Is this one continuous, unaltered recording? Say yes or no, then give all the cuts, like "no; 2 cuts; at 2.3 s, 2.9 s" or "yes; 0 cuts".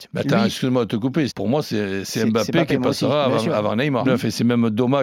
no; 2 cuts; at 1.3 s, 4.0 s